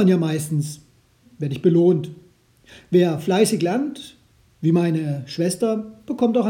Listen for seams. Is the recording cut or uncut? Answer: cut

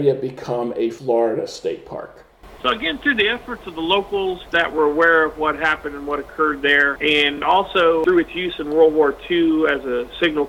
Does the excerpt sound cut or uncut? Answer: uncut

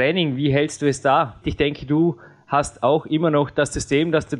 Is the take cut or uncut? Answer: cut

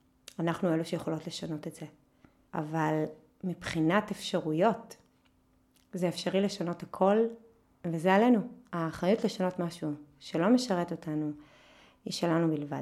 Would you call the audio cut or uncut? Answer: cut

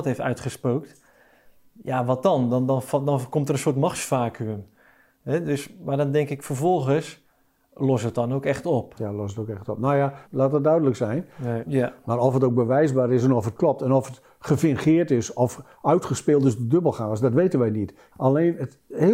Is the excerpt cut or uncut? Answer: cut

